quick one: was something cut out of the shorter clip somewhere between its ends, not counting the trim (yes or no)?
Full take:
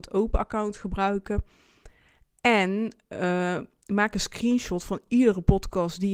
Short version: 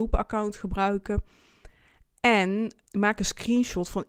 yes